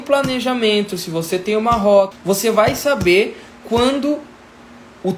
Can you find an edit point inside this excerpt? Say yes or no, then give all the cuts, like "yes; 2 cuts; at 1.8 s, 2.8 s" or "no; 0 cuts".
yes; 1 cut; at 2.1 s